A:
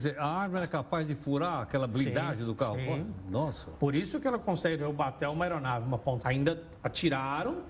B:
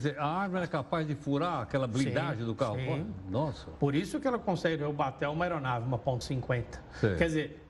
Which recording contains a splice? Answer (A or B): A